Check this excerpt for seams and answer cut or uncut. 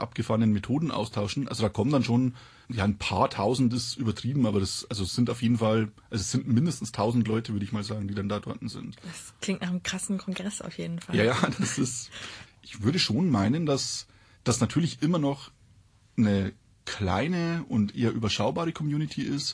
uncut